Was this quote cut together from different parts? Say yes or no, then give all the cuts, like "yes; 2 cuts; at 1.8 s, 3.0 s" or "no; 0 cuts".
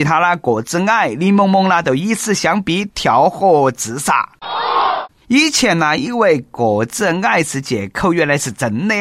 no; 0 cuts